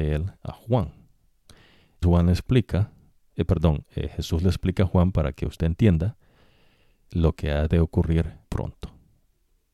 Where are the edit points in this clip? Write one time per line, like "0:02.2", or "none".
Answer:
0:02.0
0:07.1
0:08.4